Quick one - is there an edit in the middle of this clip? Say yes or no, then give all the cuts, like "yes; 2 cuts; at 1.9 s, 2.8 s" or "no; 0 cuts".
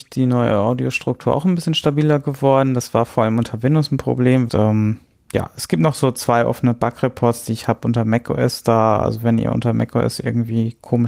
yes; 1 cut; at 4.5 s